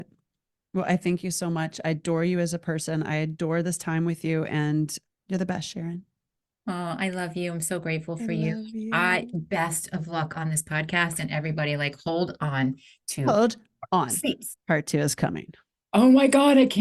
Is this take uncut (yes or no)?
no